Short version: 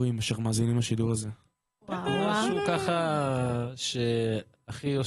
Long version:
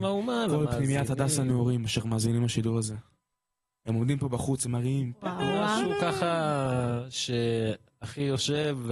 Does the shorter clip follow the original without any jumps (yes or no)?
no